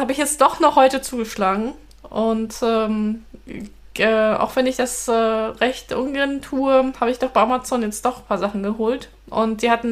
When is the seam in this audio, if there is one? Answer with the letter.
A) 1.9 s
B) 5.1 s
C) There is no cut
C